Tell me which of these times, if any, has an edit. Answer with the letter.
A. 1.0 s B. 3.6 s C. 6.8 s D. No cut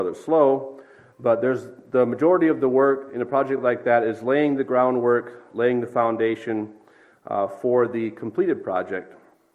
D